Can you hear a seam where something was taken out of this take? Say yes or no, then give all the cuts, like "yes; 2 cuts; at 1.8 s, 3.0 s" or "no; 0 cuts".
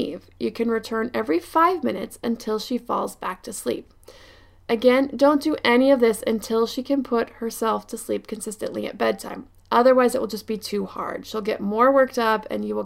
no; 0 cuts